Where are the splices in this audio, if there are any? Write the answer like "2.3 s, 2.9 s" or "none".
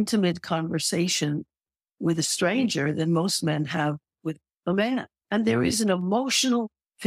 5.2 s